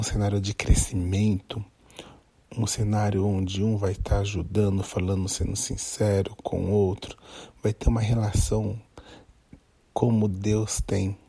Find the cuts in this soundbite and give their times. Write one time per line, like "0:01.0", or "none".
none